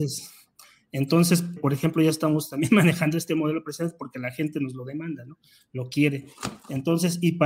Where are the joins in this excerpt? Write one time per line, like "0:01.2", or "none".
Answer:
0:01.6